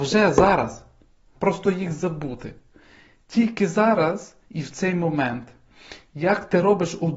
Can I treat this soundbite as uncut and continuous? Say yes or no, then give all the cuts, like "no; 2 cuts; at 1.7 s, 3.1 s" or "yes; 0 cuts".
no; 1 cut; at 1.4 s